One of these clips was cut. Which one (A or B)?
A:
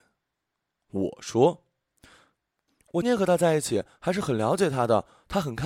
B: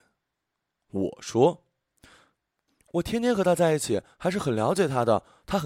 A